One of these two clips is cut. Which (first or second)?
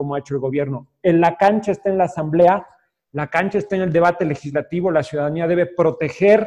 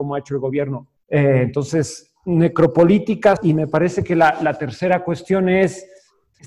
second